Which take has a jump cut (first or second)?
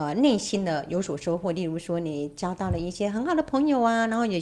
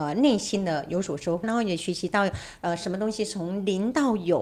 second